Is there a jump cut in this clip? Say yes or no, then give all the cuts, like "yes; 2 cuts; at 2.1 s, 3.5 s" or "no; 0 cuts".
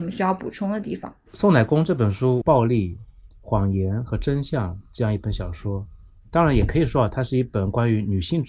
yes; 1 cut; at 2.4 s